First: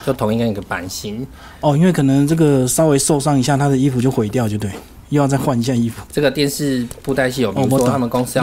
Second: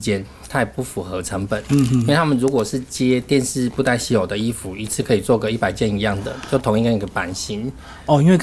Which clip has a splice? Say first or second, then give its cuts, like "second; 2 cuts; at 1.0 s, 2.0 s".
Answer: first; 1 cut; at 6.1 s